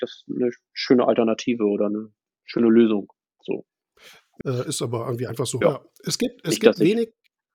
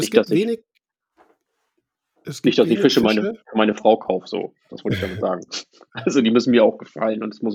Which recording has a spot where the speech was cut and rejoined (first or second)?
first